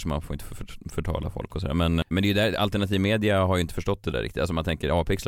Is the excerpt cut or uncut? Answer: cut